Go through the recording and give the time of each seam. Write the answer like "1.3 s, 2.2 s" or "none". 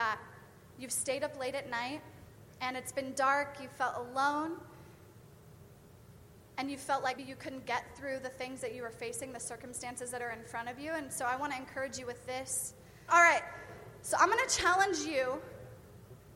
7.2 s, 13.1 s